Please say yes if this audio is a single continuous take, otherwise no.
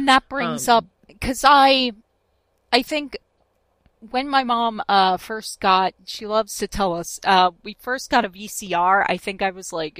yes